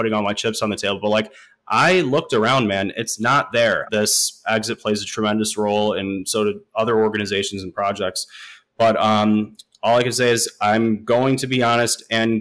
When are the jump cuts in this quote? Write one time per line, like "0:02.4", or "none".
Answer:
0:03.9